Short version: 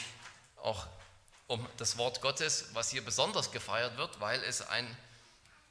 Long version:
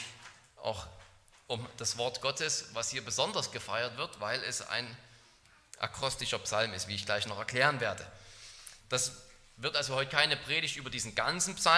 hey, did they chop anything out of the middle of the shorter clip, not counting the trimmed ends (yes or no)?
no